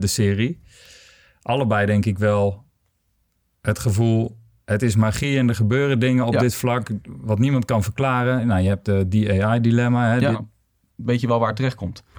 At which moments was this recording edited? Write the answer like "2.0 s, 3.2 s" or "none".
10.3 s